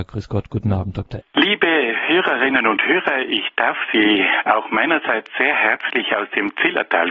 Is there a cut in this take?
yes; 1 cut; at 1.2 s

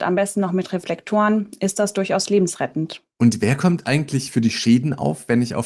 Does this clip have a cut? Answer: no; 0 cuts

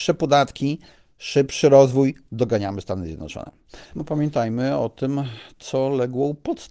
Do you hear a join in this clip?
yes; 1 cut; at 3.9 s

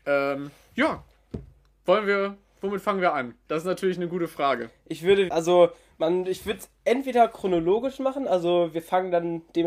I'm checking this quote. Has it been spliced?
yes; 1 cut; at 5.3 s

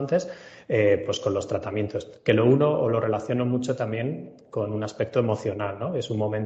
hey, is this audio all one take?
yes; 0 cuts

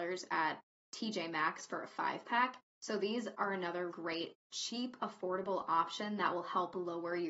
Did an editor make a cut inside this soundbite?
yes; 1 cut; at 3.9 s

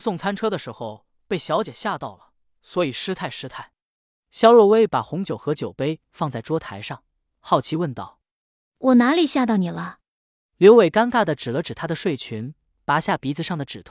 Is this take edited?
no; 0 cuts

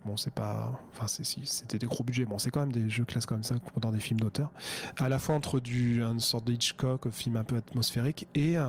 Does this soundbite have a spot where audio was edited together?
no; 0 cuts

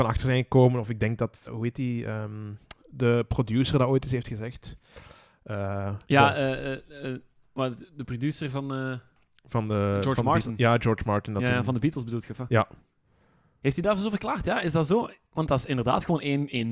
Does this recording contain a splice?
yes; 1 cut; at 1.5 s

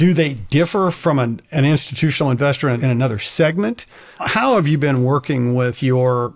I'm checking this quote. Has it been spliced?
no; 0 cuts

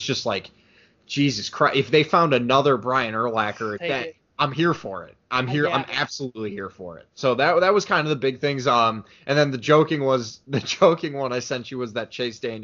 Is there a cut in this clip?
yes; 1 cut; at 3.8 s

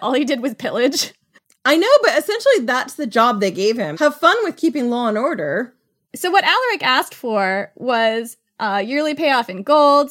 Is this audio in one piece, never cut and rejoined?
no; 1 cut; at 3.9 s

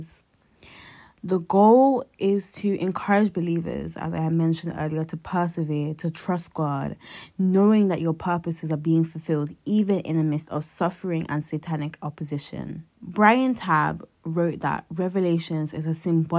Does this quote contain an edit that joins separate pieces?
yes; 1 cut; at 12.9 s

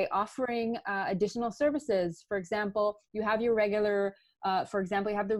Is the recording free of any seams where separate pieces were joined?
yes; 0 cuts

